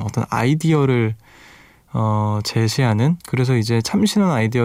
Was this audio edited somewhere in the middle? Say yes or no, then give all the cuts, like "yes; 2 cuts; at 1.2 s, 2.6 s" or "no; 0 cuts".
yes; 1 cut; at 3.2 s